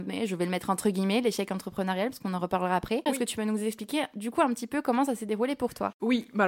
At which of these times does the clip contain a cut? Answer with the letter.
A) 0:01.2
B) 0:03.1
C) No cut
B